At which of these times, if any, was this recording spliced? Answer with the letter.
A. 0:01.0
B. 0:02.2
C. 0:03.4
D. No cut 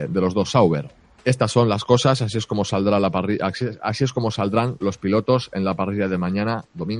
D